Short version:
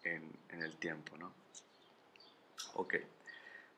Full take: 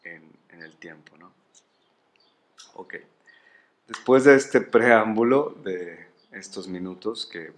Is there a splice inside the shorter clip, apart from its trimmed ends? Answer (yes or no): no